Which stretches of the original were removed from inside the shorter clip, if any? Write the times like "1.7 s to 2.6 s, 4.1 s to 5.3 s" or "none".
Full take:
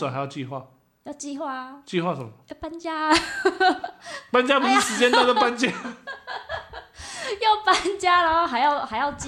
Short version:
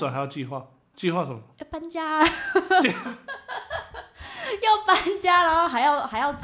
0.9 s to 1.8 s, 3.7 s to 5.6 s